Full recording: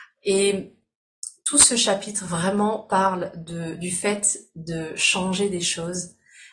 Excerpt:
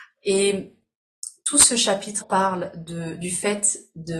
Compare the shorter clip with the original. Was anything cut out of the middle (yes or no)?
yes